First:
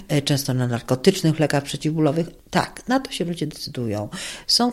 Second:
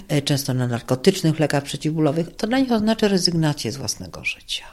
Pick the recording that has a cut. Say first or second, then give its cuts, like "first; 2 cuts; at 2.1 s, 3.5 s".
second; 1 cut; at 2.4 s